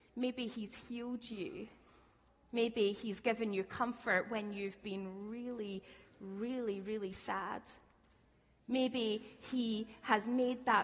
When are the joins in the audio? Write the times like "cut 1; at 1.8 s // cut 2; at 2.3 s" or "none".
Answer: none